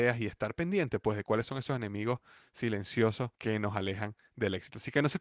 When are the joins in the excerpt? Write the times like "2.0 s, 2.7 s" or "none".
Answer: 3.4 s